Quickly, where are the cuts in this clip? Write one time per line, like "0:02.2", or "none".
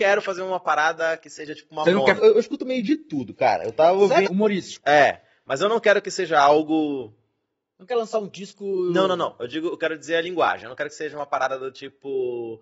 0:02.2
0:04.2